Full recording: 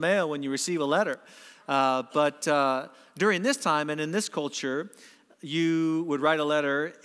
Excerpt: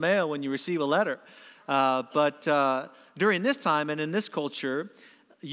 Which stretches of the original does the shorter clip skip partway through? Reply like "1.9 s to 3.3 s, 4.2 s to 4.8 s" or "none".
none